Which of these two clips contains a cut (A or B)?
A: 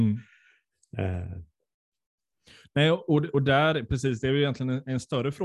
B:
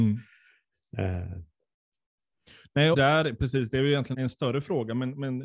B